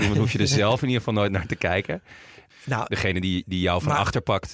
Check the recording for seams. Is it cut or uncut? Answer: cut